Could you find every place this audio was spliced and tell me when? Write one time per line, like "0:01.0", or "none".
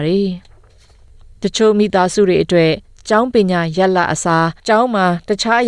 0:04.6

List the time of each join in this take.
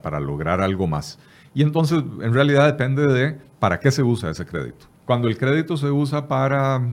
0:05.0

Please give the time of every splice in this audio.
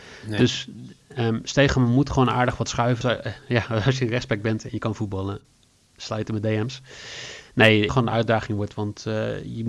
0:03.0
0:07.9

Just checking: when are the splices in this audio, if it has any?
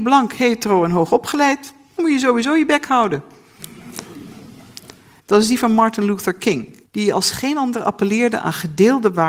0:05.2
0:06.9

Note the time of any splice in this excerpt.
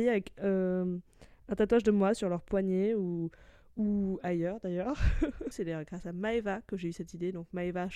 0:05.5

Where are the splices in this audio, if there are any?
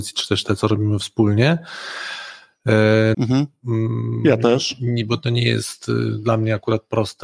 0:03.1

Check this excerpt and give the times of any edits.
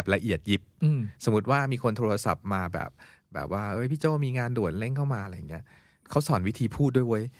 none

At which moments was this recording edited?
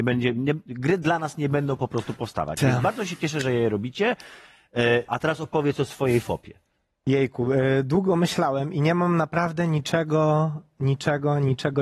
0:05.1

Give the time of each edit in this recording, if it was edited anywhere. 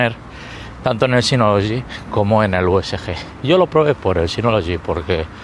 none

